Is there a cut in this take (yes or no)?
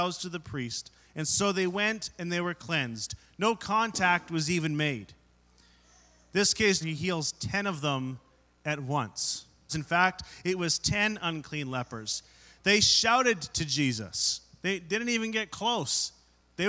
yes